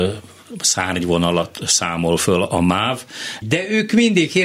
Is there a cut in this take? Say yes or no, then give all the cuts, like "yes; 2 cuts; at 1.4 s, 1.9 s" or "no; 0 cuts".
yes; 1 cut; at 3.4 s